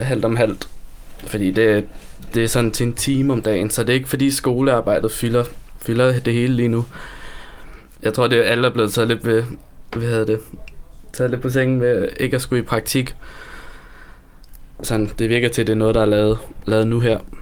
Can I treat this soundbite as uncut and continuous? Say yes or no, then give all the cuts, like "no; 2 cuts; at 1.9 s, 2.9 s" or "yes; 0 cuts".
no; 1 cut; at 14.8 s